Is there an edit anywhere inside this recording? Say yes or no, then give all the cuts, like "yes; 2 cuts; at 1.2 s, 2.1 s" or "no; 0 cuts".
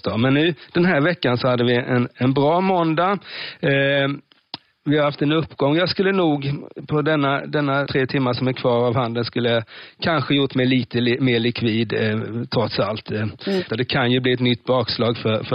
yes; 2 cuts; at 7.9 s, 13.7 s